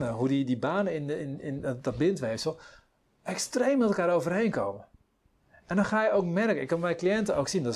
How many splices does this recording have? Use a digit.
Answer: 0